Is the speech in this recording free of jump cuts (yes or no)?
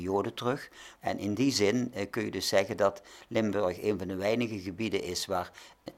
no